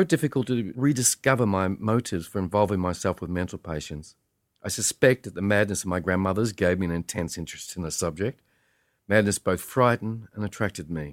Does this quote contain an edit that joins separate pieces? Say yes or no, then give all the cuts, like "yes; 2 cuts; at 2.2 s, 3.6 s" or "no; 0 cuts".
no; 0 cuts